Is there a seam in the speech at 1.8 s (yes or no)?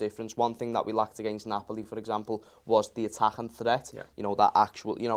no